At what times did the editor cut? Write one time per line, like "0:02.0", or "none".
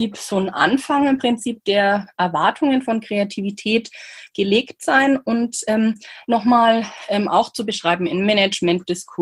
0:06.3

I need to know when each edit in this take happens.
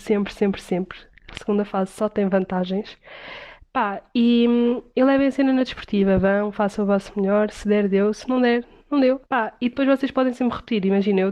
0:09.3

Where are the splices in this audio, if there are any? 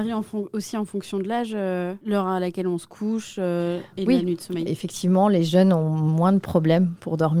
0:04.7

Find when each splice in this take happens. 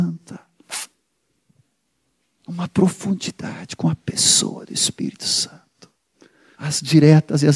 0:06.5

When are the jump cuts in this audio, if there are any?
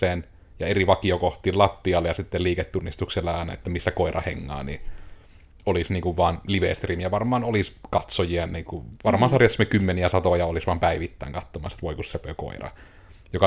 none

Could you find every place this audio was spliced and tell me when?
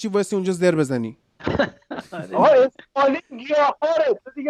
none

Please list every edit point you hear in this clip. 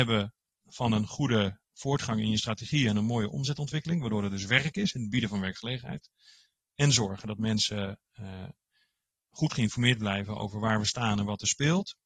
none

